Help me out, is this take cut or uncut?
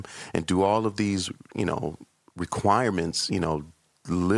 uncut